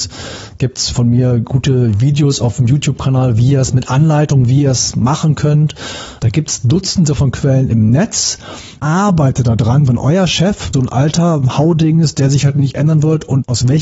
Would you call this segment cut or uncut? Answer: cut